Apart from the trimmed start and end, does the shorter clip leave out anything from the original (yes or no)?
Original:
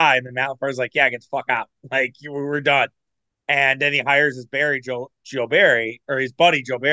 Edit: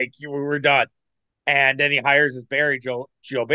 no